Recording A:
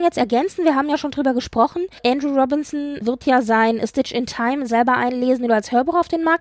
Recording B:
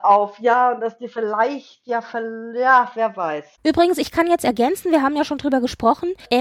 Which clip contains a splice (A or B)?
B